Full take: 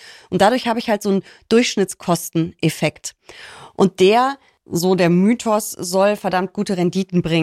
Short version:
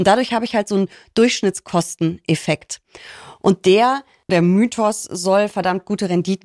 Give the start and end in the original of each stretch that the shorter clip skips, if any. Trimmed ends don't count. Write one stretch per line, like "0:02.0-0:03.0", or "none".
0:04.6-0:05.0